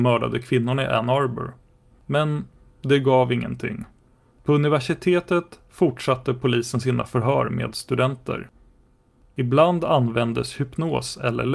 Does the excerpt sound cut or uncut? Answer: cut